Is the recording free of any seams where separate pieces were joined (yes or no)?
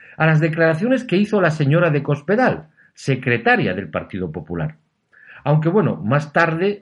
yes